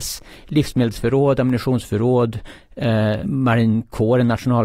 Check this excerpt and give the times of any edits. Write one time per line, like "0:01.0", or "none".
0:03.2